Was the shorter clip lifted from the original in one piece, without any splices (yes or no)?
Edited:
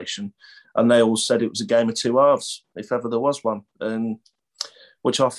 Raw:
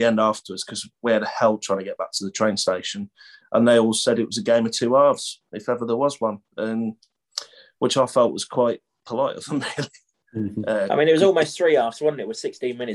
yes